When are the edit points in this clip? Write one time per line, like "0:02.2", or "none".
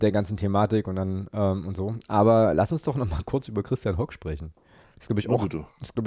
0:04.8